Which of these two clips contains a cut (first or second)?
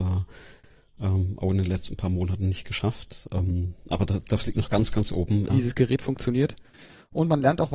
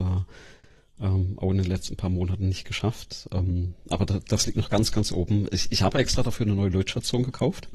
first